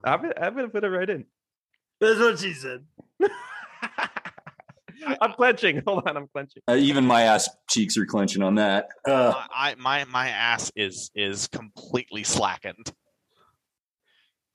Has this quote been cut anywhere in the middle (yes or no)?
no